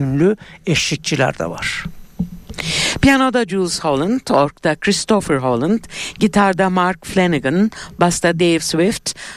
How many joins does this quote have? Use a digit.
0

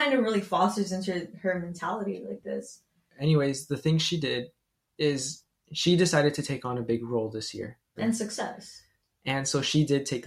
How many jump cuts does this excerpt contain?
1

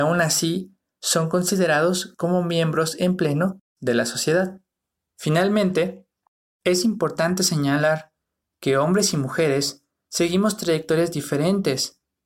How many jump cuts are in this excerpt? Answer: 1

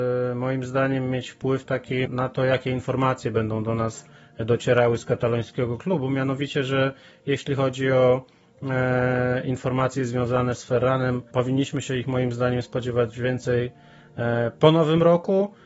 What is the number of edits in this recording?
1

